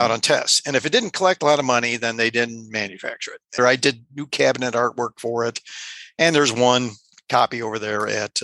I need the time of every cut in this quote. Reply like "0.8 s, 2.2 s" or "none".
3.6 s